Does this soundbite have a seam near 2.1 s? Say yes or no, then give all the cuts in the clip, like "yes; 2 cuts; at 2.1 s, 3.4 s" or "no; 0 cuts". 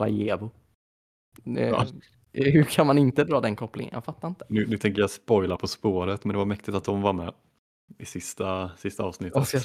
no; 0 cuts